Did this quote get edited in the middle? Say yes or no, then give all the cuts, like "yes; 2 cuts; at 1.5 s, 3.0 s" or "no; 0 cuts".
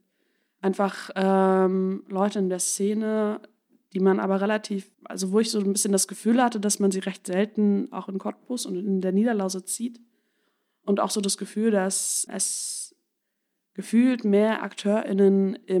yes; 2 cuts; at 4.9 s, 12.3 s